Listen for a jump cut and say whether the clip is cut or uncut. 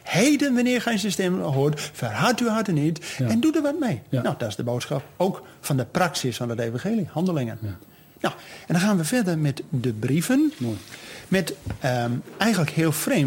uncut